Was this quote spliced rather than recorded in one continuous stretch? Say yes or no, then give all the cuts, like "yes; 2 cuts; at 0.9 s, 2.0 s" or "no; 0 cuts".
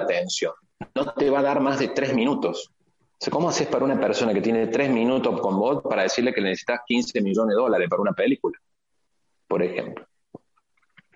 no; 0 cuts